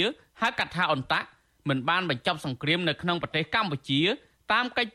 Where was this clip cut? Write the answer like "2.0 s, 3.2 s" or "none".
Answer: none